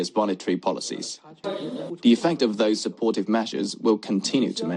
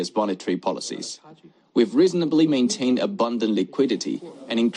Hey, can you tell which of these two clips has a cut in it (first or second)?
first